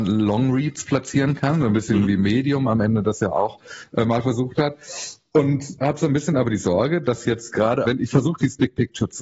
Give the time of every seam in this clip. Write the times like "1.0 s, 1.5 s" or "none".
5.8 s, 7.8 s